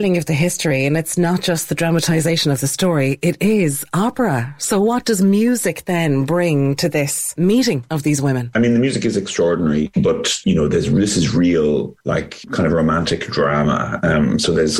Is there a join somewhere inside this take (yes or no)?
yes